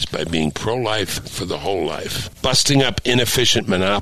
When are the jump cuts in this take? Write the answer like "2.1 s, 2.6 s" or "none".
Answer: 2.3 s